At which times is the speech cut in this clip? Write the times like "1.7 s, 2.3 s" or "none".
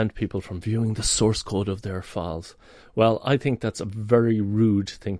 none